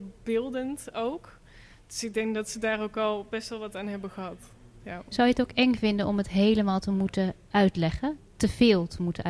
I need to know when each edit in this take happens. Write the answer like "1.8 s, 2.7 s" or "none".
none